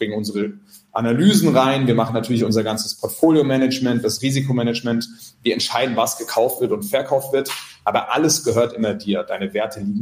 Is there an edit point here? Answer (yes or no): no